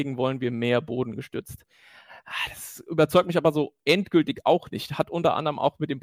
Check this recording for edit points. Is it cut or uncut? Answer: uncut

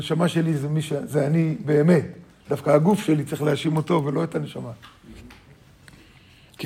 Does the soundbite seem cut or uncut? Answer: uncut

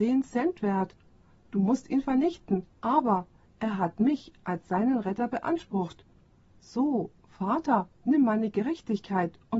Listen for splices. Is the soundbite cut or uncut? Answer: cut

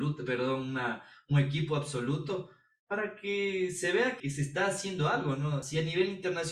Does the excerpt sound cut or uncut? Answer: cut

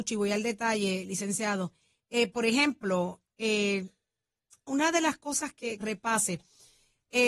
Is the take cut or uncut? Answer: cut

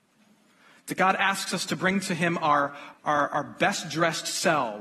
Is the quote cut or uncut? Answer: cut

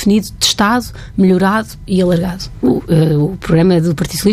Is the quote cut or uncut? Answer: cut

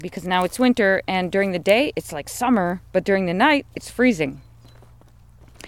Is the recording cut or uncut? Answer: uncut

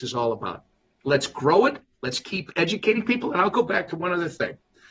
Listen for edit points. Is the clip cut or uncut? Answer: uncut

